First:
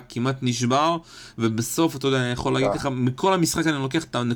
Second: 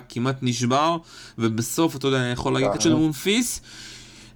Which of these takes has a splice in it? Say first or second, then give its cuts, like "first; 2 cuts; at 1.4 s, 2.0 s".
second; 1 cut; at 2.8 s